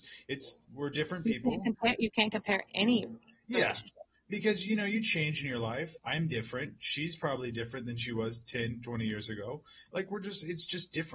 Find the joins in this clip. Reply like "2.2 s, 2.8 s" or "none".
6.0 s

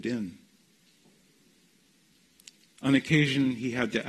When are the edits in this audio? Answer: 2.7 s

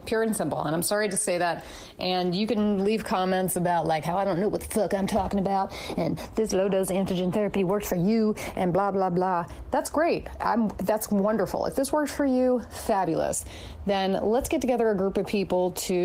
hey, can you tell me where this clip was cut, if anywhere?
none

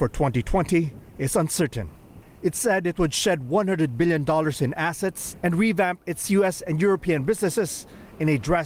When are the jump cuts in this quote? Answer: 5.4 s

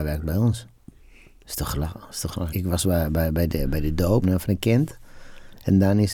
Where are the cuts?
2.5 s, 4.2 s

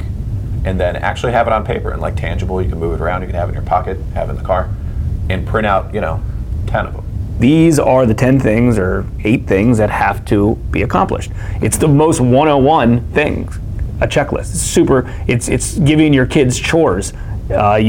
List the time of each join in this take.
7.4 s

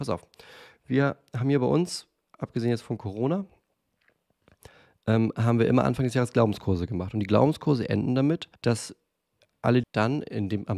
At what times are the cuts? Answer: 8.6 s, 9.8 s

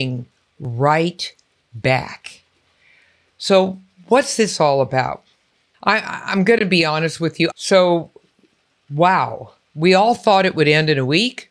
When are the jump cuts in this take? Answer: 5.7 s, 7.5 s

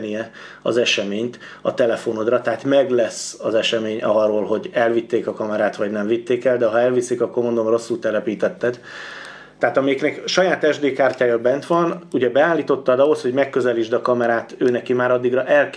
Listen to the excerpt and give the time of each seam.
9.6 s

